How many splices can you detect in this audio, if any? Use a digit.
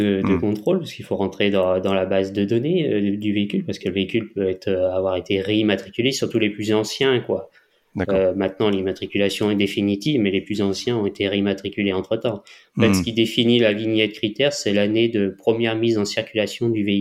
0